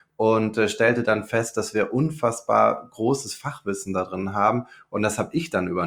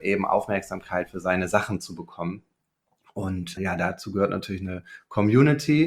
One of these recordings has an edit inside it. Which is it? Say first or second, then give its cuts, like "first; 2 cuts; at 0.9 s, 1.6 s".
second; 1 cut; at 3.6 s